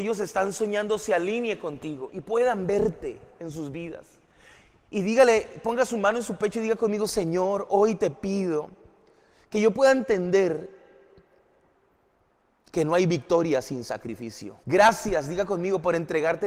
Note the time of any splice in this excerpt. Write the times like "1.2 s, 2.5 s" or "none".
14.6 s